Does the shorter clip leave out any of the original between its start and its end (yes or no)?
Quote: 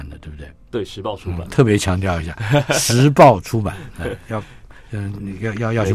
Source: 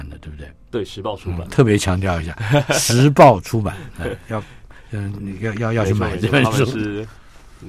no